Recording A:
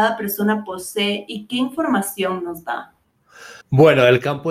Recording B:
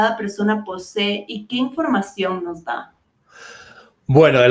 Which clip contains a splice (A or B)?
A